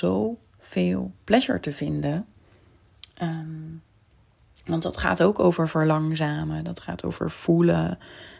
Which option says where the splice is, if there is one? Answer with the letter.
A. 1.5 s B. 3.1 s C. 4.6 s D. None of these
D